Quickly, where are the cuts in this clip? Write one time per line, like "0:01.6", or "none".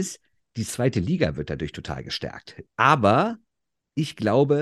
0:02.7